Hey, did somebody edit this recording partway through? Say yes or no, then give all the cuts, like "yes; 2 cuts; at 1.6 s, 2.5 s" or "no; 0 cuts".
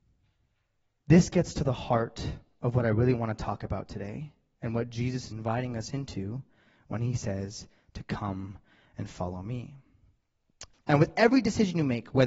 yes; 2 cuts; at 5.3 s, 10.7 s